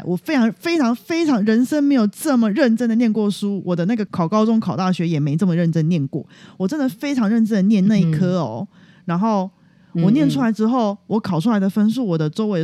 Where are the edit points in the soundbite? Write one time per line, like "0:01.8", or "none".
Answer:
0:04.1

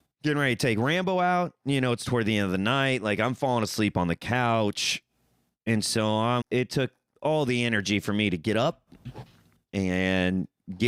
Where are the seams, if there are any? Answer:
0:06.4

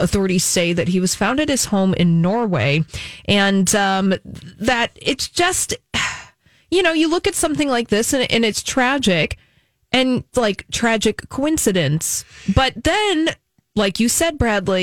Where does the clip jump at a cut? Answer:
0:10.3

